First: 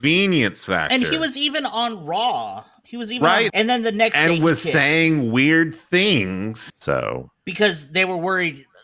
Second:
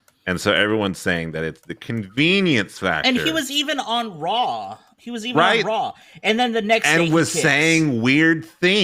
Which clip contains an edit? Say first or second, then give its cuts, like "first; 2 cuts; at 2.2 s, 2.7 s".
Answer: first; 2 cuts; at 3.5 s, 6.7 s